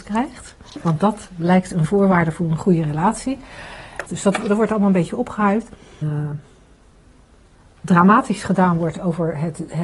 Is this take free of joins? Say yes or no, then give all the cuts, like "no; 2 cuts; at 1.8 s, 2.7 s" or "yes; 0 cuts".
no; 2 cuts; at 4.1 s, 6.0 s